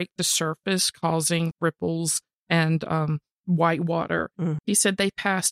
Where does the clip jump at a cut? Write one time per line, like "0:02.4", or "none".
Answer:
0:01.5
0:04.6